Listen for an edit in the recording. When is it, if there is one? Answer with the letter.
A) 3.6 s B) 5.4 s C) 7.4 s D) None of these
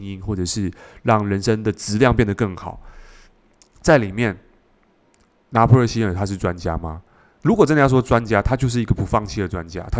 A